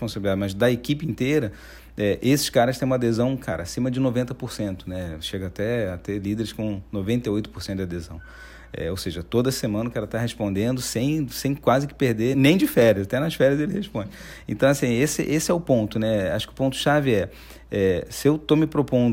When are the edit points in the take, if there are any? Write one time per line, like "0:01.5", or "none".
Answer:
0:12.3